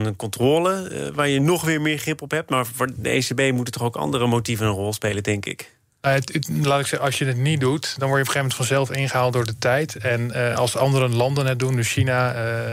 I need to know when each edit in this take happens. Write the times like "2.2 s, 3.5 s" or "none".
none